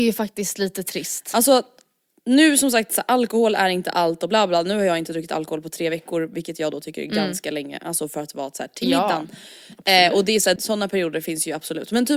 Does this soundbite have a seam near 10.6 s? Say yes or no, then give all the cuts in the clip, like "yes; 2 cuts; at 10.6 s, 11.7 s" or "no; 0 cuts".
yes; 1 cut; at 10.6 s